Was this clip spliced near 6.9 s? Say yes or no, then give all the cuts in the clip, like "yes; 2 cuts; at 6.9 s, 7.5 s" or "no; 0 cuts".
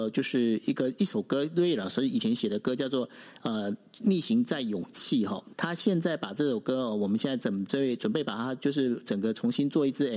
no; 1 cut; at 5.5 s